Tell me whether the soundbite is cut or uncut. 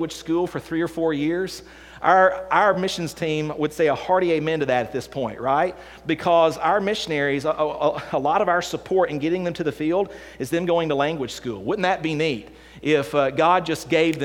uncut